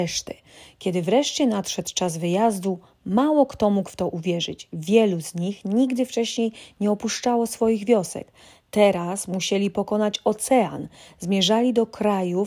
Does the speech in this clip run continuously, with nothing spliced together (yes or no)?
yes